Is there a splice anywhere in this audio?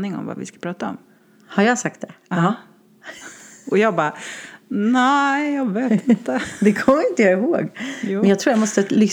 no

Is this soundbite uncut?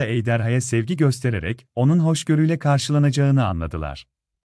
yes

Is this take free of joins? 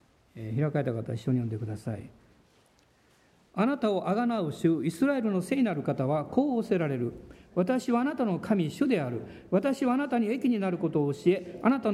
yes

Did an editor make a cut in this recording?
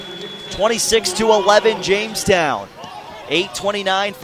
no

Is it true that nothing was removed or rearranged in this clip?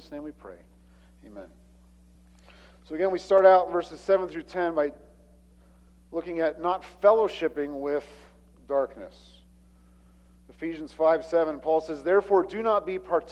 yes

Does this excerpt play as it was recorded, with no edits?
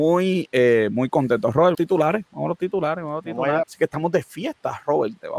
no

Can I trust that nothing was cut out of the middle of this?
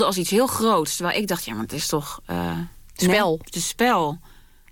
yes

